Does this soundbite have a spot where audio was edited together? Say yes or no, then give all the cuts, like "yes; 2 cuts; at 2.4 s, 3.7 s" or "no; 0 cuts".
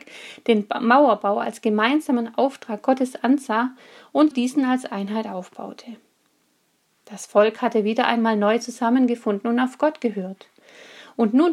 yes; 1 cut; at 4.3 s